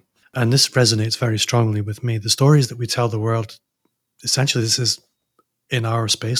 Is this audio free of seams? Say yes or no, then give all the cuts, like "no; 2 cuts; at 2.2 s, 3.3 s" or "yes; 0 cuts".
yes; 0 cuts